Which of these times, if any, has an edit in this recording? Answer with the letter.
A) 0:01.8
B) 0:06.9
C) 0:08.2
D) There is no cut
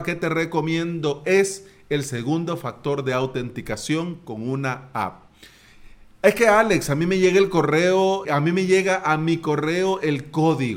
C